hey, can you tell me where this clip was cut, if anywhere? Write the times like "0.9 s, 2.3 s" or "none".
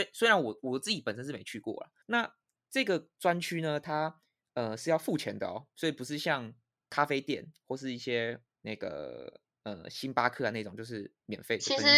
2.0 s